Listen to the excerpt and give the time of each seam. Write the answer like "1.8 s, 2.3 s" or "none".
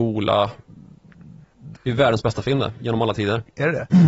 1.7 s

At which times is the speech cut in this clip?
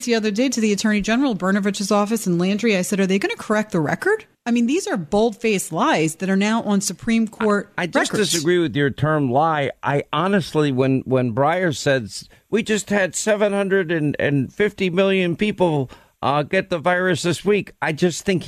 none

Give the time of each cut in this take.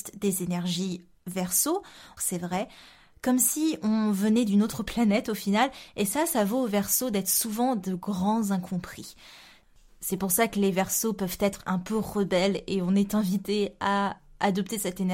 2.2 s

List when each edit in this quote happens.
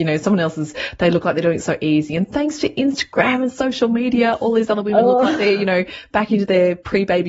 none

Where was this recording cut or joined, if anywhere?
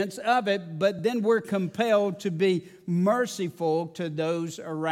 none

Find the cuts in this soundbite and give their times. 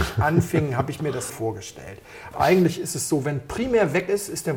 1.3 s, 2.3 s

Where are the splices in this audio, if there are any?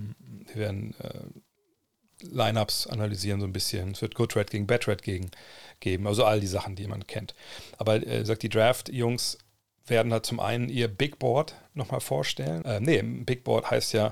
12.6 s

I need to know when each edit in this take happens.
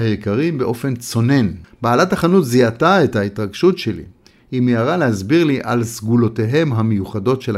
1.6 s

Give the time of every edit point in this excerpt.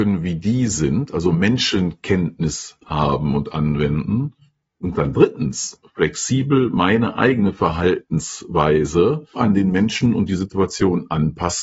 9.3 s

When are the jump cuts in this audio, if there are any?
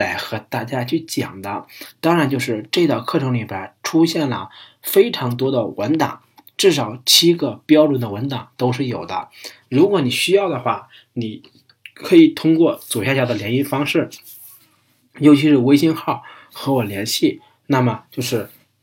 9.6 s

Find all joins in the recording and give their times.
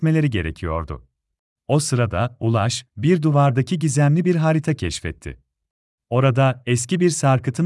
1.6 s, 6.0 s

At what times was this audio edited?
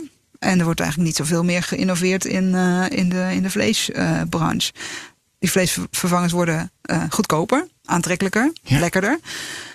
none

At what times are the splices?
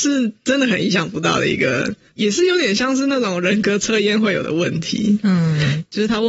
none

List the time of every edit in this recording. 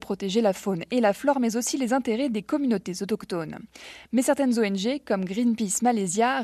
none

